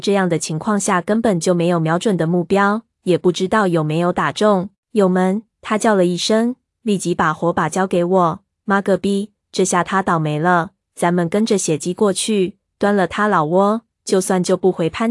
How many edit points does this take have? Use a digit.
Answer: 1